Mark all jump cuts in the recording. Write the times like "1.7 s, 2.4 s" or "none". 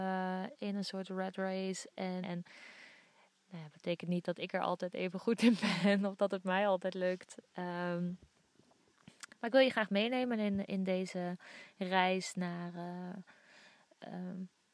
2.2 s